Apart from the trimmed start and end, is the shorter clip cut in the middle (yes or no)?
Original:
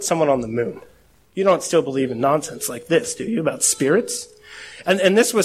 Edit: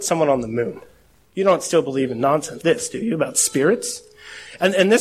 yes